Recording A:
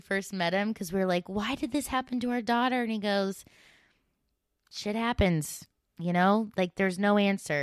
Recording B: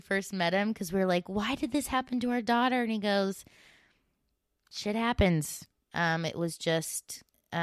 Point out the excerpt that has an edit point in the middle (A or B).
B